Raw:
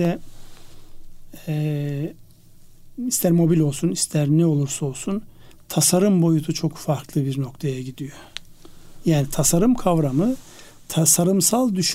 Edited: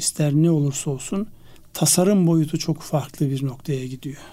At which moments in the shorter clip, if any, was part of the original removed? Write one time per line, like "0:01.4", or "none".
none

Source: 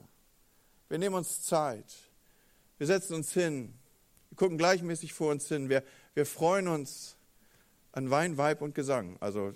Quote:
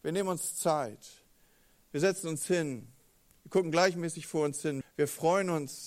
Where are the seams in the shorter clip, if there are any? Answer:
0:04.8

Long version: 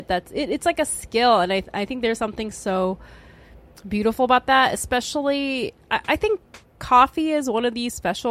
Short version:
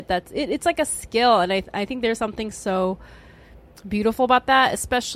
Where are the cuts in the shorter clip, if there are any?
none

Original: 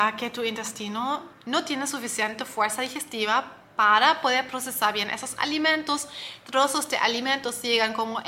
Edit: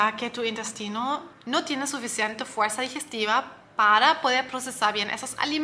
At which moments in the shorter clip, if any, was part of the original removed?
none

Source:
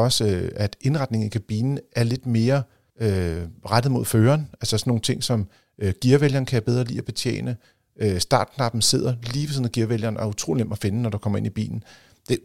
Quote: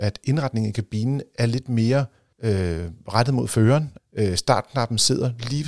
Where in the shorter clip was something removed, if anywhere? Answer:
0:04.0

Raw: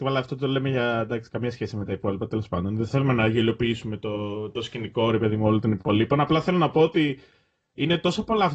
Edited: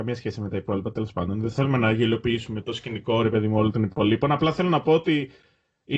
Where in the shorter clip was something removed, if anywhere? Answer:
0:02.6

